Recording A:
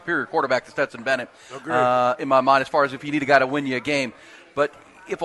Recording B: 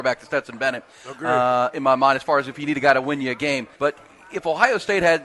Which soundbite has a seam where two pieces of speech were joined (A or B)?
B